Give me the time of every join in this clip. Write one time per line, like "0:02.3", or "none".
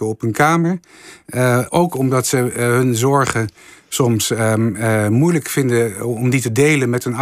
none